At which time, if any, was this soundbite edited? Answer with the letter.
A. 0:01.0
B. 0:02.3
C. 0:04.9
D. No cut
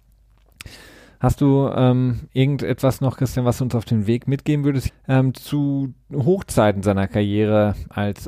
C